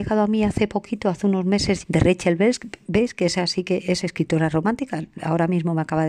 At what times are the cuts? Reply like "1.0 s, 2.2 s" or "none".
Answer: 1.8 s